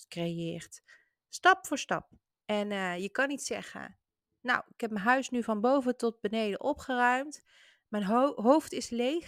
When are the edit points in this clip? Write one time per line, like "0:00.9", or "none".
0:02.4